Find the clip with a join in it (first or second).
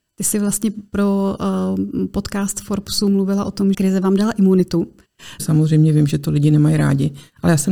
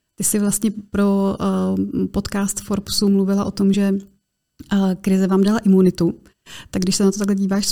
first